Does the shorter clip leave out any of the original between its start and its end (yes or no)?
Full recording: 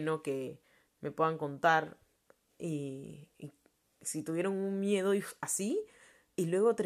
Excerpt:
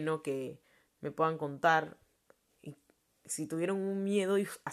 yes